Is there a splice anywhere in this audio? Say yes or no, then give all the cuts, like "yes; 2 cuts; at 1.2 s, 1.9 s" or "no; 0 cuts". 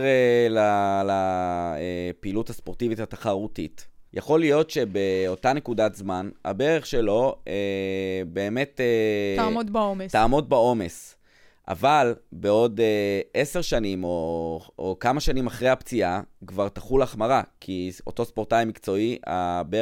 yes; 1 cut; at 4.1 s